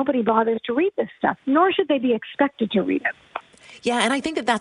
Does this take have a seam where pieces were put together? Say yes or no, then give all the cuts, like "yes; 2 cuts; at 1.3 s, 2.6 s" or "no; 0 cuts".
no; 0 cuts